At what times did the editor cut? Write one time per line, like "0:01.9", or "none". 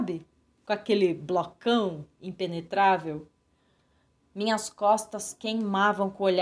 0:04.2